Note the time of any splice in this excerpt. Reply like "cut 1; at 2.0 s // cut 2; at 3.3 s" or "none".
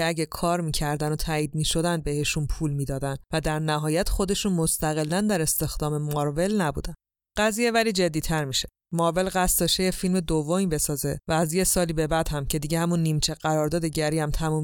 none